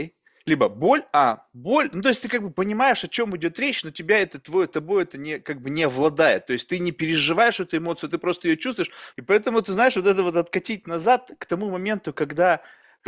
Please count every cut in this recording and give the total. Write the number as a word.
one